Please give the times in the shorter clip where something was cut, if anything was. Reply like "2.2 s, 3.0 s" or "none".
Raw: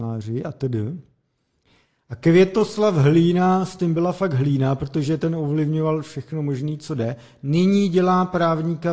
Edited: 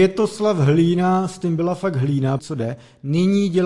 2.4 s